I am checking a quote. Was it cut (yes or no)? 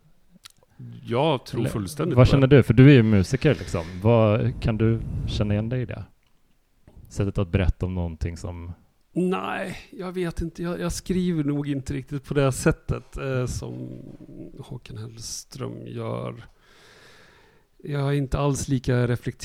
no